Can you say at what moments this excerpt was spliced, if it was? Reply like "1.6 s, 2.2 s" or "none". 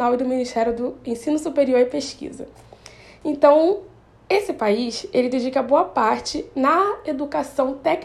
none